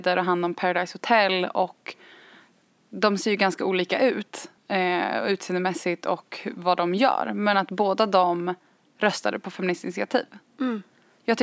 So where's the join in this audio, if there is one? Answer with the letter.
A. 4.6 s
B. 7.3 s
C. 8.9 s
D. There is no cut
A